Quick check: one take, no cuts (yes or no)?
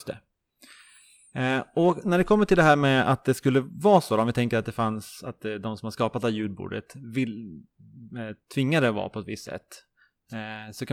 yes